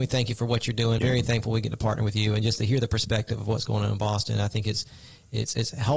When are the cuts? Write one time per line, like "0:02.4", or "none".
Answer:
0:01.0